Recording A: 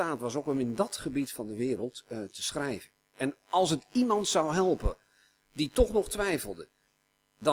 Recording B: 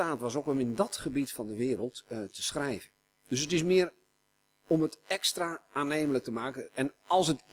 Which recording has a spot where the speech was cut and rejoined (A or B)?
A